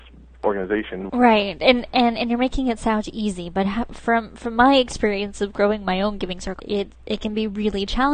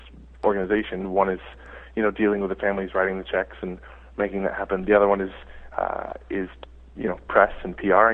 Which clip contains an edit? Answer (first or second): first